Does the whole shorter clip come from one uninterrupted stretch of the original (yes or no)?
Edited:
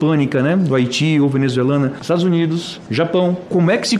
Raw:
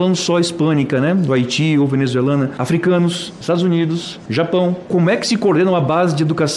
no